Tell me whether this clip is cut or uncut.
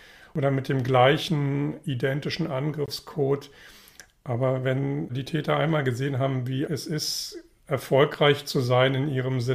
cut